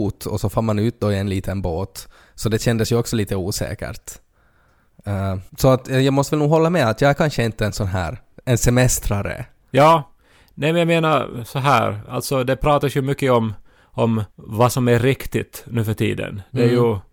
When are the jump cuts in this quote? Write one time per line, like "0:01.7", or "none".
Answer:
0:05.5
0:14.3